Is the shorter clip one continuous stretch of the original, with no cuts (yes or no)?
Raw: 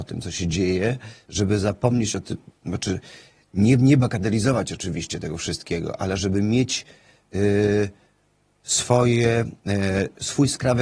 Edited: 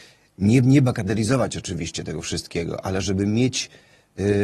yes